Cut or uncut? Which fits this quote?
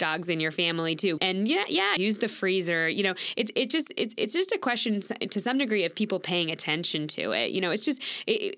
cut